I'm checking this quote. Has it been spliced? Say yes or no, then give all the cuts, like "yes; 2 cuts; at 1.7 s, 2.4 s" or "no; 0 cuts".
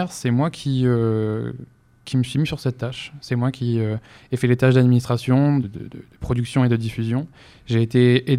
yes; 1 cut; at 5.6 s